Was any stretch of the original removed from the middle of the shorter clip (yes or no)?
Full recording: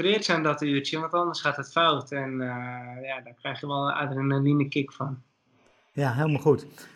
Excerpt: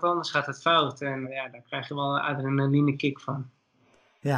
yes